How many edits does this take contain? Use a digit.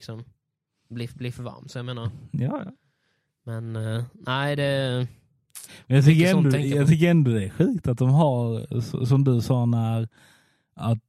0